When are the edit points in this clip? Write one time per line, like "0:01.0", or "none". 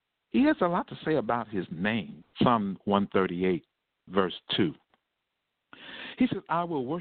0:02.2